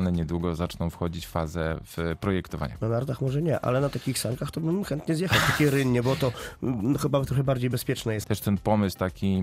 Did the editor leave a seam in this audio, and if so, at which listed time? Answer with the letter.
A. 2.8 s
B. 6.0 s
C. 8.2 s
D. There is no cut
C